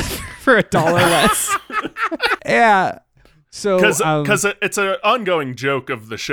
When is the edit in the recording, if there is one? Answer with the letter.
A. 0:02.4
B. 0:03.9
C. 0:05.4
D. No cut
A